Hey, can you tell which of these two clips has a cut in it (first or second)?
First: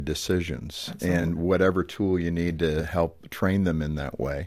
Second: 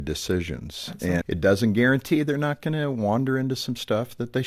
second